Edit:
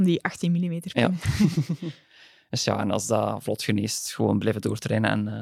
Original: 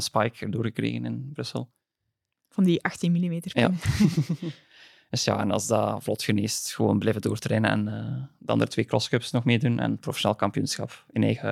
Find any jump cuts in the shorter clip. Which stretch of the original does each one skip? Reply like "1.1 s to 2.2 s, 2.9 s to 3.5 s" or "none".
none